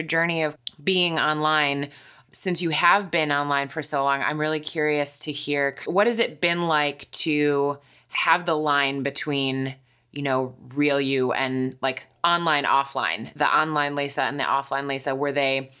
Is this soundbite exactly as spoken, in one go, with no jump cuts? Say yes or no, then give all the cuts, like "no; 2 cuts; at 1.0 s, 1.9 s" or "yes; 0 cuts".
yes; 0 cuts